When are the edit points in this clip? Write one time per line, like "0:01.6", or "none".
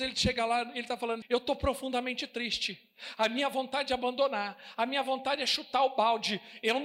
0:01.2